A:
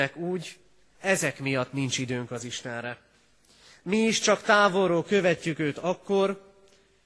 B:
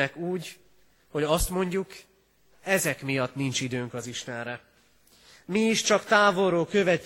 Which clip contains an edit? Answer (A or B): A